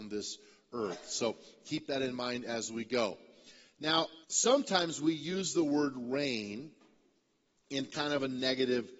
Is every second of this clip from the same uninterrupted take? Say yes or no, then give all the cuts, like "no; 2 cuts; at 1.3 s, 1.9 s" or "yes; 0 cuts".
no; 1 cut; at 4.2 s